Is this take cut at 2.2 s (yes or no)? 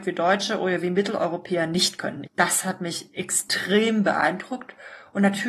yes